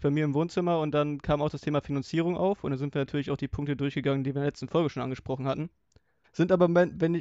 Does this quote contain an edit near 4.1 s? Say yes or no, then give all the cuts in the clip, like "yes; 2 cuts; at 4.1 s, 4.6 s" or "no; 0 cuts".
no; 1 cut; at 6.2 s